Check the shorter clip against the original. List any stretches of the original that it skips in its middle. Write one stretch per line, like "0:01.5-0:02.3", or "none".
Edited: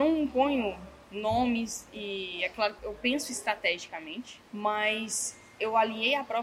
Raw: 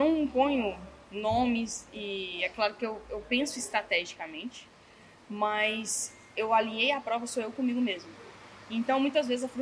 0:02.8-0:03.1
0:04.7-0:05.2